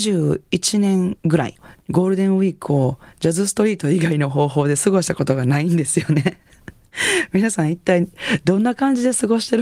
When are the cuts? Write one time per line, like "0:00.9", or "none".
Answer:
none